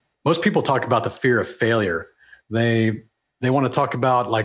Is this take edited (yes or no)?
no